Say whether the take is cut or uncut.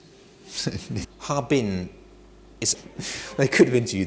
cut